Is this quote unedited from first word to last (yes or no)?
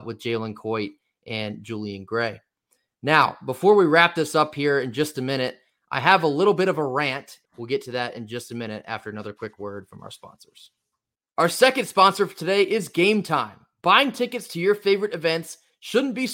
no